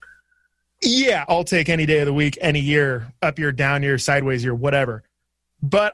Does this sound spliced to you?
yes; 1 cut; at 1.3 s

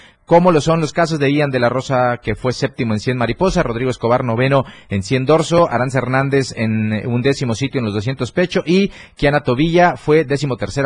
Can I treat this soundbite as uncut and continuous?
yes; 0 cuts

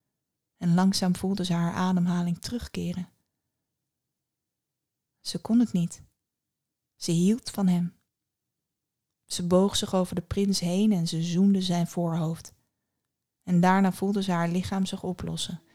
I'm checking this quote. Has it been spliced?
no; 0 cuts

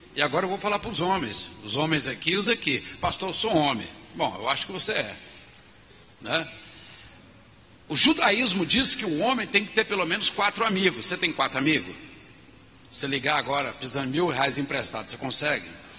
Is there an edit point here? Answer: no; 0 cuts

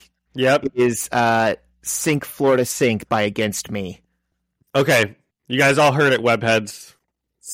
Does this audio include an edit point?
no; 0 cuts

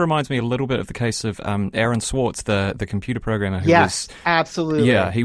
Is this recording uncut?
yes; 0 cuts

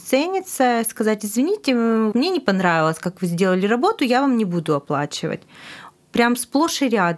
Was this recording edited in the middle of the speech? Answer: yes; 1 cut; at 2.1 s

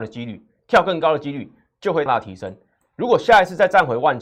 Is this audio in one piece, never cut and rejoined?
no; 1 cut; at 2.1 s

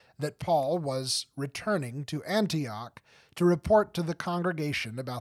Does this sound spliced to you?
no; 0 cuts

